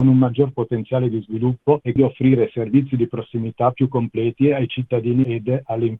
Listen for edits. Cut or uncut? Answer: cut